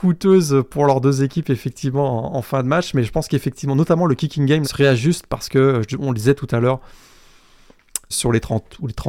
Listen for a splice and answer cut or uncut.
cut